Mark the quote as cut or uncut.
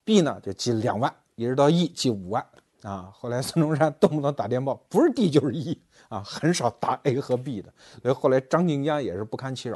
uncut